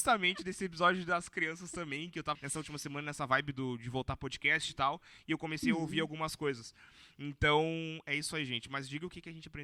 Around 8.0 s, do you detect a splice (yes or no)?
no